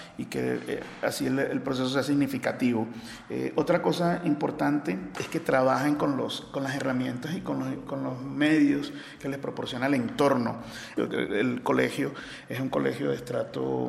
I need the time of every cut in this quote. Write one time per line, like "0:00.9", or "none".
0:11.0